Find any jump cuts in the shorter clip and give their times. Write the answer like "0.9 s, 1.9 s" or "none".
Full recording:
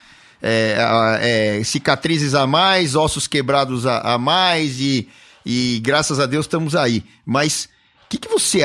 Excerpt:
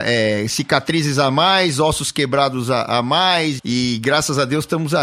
3.6 s